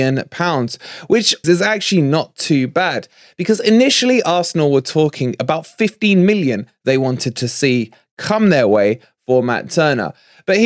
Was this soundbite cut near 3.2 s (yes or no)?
no